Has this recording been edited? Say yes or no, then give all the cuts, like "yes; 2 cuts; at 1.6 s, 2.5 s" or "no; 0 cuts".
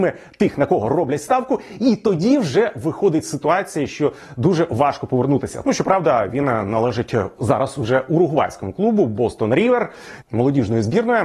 yes; 2 cuts; at 5.6 s, 10.2 s